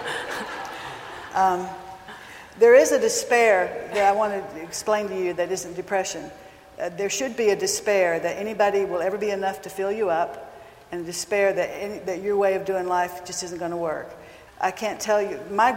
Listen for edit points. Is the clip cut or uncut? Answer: cut